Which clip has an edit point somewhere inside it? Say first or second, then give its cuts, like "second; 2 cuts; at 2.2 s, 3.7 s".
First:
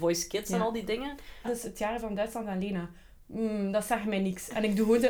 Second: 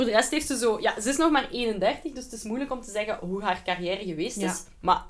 first; 1 cut; at 1.4 s